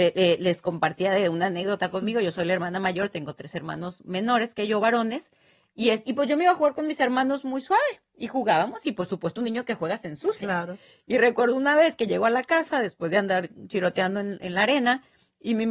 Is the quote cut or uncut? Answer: uncut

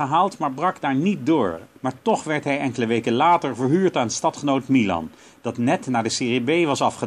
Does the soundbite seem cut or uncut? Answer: cut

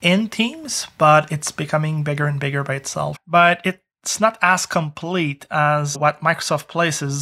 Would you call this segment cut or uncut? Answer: cut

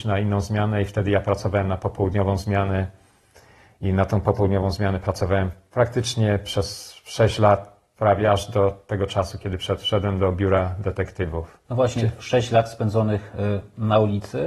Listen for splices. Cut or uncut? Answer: cut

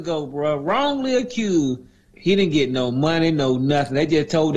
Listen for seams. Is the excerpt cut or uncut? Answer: cut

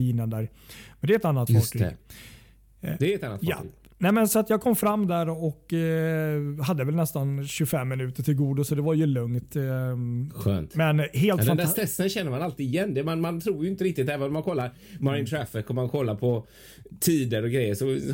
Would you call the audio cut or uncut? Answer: uncut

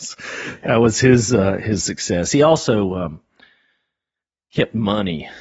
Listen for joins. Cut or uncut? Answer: uncut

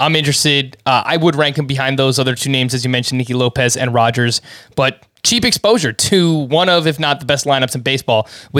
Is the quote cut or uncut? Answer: uncut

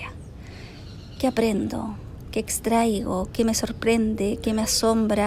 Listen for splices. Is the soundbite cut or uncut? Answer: uncut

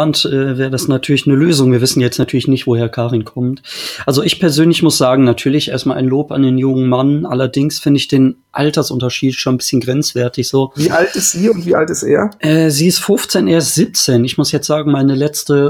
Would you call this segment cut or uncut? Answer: uncut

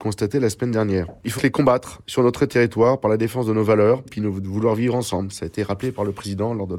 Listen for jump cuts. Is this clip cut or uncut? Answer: cut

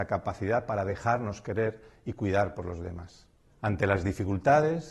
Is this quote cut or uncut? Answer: cut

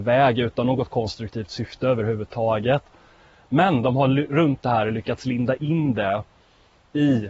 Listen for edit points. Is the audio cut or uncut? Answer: uncut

